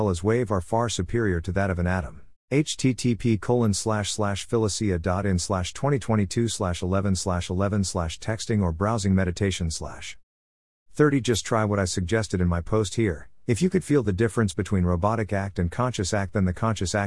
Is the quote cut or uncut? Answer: cut